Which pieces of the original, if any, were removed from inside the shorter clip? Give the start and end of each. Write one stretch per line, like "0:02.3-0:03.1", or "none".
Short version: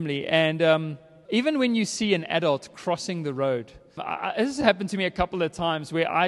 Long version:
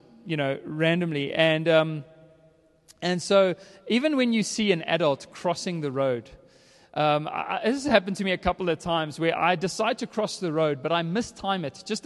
0:02.3-0:03.8
0:06.5-0:07.2